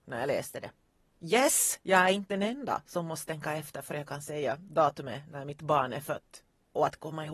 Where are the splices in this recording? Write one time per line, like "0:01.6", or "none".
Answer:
none

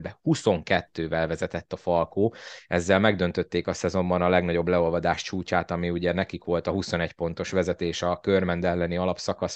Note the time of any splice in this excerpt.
none

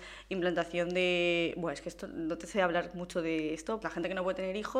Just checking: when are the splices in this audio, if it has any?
0:03.8

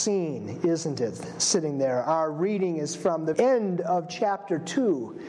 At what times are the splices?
0:03.3

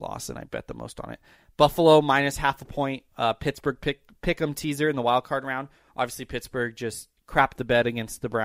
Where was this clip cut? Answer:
none

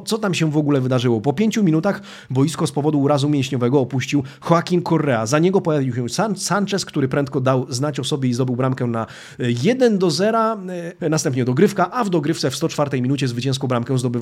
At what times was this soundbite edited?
0:11.0

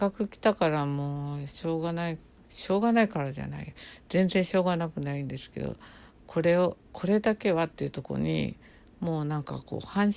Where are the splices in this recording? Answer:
none

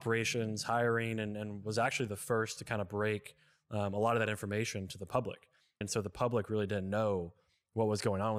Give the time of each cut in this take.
0:05.8

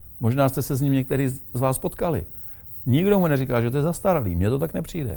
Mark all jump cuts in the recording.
0:02.8

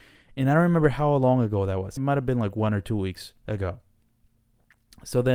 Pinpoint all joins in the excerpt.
0:02.0

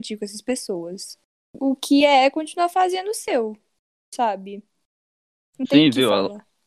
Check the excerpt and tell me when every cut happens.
none

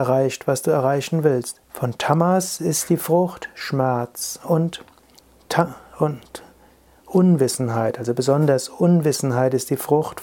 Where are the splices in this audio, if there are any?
0:01.6

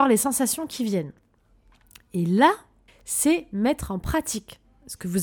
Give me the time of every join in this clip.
0:02.9

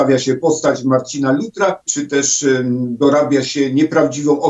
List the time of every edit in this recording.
0:01.9

